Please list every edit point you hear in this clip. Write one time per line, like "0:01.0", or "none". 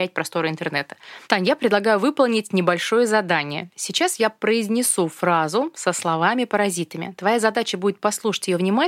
0:01.2